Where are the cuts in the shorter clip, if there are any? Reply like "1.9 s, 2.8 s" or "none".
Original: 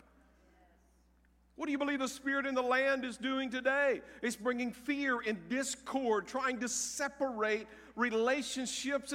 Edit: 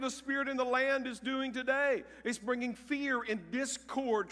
none